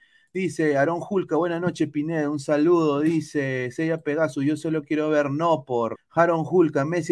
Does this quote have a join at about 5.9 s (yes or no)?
yes